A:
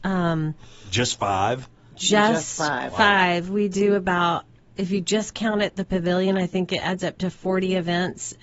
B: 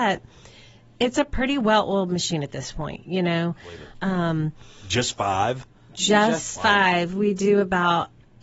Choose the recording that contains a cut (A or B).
B